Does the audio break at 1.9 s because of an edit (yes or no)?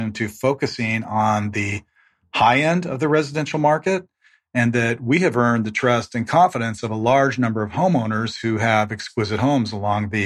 no